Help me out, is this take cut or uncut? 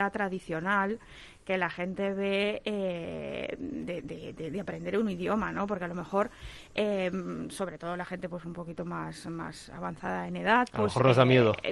uncut